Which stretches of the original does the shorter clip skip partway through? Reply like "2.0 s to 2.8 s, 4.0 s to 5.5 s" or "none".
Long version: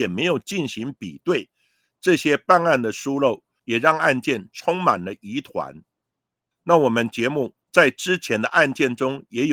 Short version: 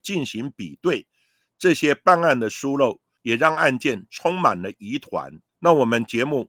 5.9 s to 6.5 s